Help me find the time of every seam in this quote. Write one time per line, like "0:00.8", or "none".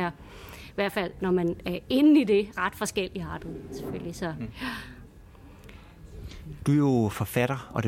none